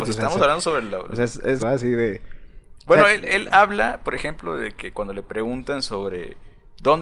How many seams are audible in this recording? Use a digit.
1